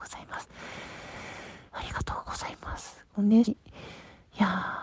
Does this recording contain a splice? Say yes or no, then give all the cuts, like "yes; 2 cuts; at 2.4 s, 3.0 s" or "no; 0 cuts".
yes; 2 cuts; at 1.7 s, 3.4 s